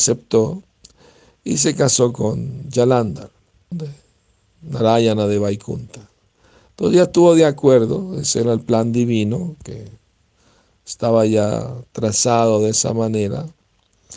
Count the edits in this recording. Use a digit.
1